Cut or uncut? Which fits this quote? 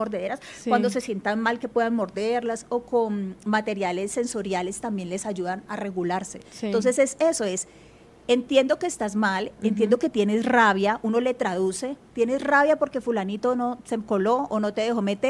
uncut